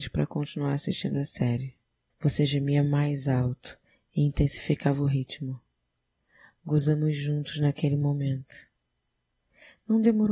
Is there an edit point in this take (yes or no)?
yes